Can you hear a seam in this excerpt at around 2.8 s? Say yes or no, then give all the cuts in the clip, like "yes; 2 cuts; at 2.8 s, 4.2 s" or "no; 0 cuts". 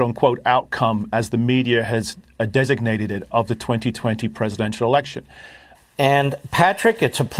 no; 1 cut; at 5.7 s